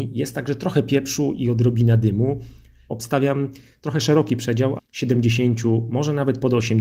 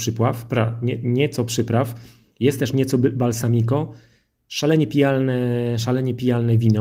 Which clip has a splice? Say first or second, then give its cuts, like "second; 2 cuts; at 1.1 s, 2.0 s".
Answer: first; 2 cuts; at 2.9 s, 4.8 s